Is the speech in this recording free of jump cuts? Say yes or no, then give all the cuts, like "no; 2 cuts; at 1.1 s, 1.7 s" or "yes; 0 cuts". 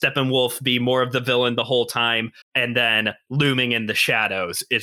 no; 1 cut; at 2.4 s